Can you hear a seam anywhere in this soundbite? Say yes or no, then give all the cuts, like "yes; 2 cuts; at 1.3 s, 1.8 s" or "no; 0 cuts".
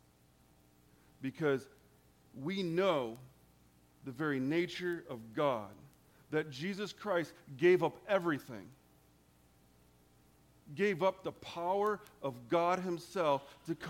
no; 0 cuts